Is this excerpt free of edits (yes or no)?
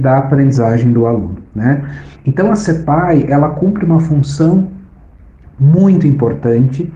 yes